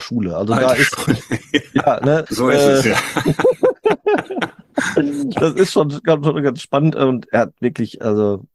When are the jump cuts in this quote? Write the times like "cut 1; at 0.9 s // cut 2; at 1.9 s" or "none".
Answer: cut 1; at 2.3 s